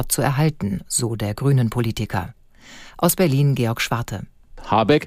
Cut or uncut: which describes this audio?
uncut